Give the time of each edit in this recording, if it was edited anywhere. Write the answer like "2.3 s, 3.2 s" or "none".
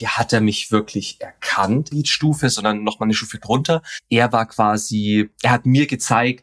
1.9 s